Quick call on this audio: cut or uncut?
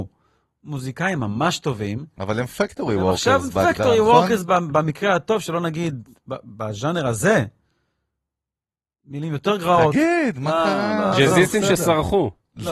uncut